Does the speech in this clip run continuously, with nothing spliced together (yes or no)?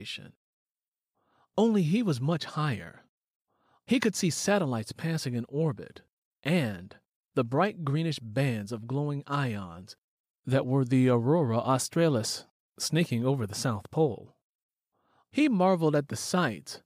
no